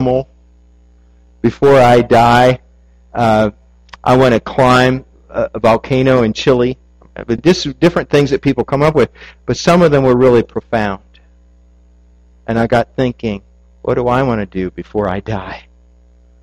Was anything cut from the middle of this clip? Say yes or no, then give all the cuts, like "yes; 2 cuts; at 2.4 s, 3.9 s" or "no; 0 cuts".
no; 0 cuts